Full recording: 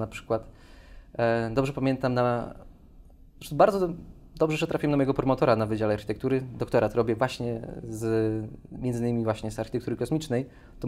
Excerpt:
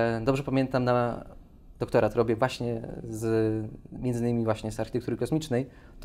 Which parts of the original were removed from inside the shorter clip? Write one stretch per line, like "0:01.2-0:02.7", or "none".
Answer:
0:03.1-0:06.6